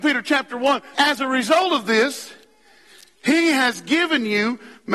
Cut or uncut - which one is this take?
cut